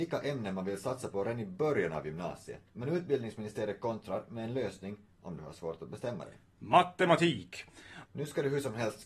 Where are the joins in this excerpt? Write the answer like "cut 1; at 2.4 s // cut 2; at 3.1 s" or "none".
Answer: cut 1; at 2.7 s // cut 2; at 8.0 s